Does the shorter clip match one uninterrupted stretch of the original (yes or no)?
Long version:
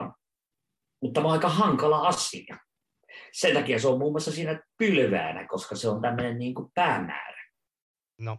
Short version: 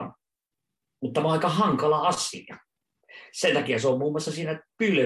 yes